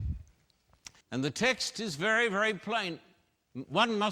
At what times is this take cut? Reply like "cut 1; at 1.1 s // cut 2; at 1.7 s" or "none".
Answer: cut 1; at 1.0 s